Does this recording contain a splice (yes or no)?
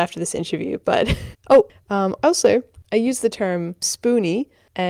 yes